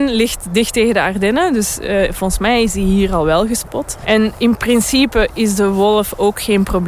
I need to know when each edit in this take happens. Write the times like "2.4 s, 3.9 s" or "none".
4.0 s